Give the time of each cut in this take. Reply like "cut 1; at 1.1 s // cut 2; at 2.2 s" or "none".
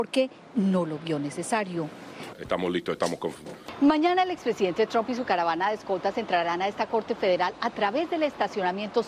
cut 1; at 2.3 s